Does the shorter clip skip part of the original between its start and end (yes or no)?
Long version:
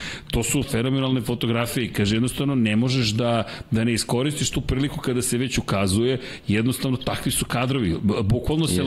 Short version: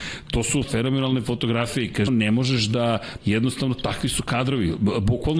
yes